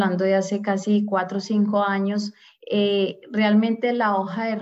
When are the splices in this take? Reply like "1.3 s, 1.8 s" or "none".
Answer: none

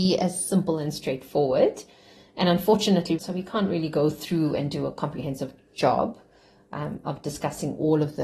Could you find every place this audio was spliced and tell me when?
3.2 s

